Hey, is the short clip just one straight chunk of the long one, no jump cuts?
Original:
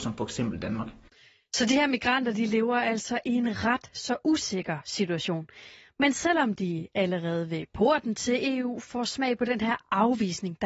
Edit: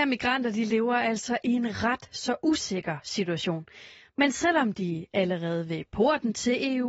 yes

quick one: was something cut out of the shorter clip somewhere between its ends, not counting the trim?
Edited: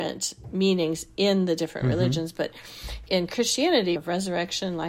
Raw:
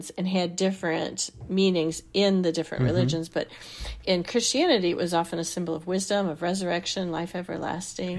yes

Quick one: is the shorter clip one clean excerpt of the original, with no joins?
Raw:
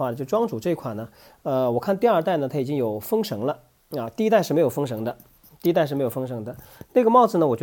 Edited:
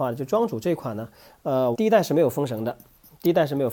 no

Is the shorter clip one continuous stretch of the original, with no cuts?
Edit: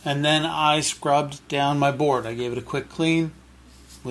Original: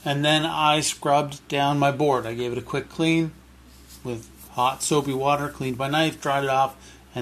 yes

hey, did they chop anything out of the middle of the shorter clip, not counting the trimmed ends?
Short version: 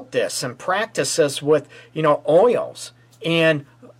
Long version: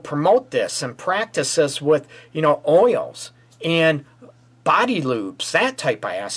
no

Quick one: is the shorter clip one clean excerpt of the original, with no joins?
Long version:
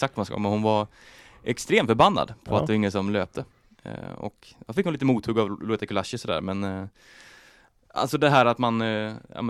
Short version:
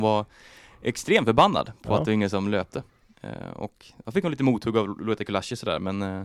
yes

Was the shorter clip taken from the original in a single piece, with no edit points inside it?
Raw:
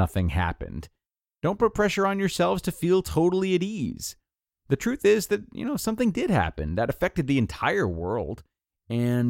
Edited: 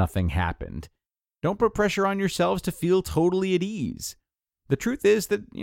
yes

